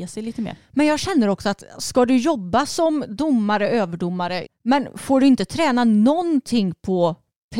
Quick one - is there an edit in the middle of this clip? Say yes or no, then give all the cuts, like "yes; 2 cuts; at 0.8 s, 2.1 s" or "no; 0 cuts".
yes; 1 cut; at 4.4 s